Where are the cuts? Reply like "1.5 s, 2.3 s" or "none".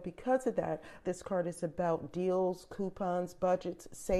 1.0 s